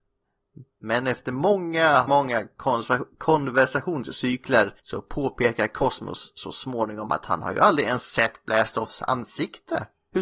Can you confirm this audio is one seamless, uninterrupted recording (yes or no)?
no